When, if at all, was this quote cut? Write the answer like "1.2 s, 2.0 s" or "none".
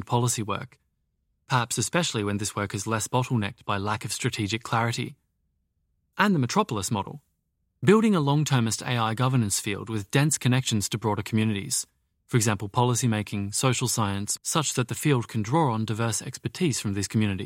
7.7 s, 14.4 s

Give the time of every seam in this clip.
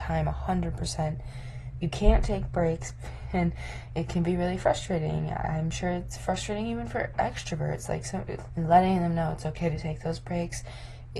8.5 s

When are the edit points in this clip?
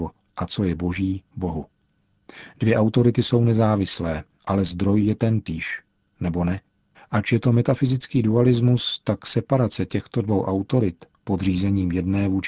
6.9 s

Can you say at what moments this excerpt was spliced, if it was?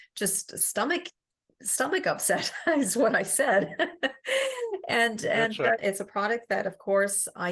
5.8 s

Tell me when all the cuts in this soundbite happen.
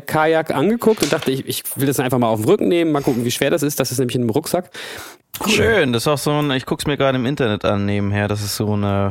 5.2 s

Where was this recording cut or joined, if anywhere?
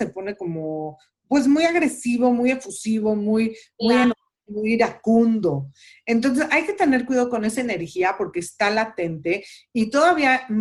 none

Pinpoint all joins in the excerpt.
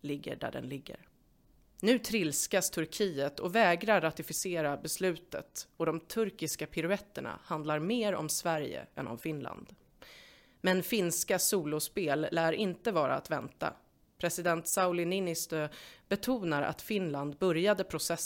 none

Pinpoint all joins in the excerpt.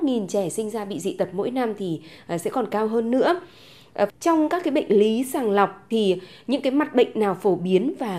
4.1 s

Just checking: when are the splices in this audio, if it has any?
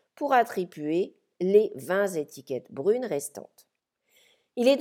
none

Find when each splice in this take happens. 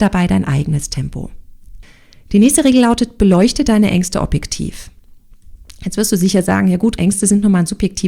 7.0 s

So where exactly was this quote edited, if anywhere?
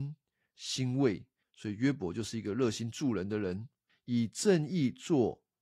1.4 s, 3.9 s

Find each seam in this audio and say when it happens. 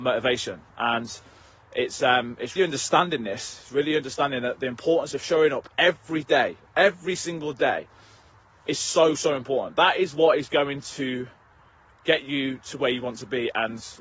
2.6 s

